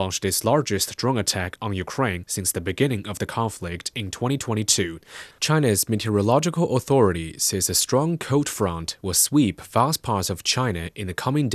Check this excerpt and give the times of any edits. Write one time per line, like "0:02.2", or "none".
0:05.3